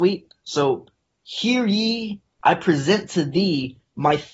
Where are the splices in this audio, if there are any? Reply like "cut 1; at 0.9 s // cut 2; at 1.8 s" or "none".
cut 1; at 2.3 s